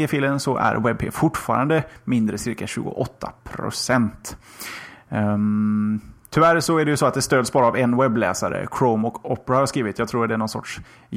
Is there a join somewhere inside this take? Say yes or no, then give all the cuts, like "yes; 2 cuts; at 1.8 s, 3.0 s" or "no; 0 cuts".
no; 0 cuts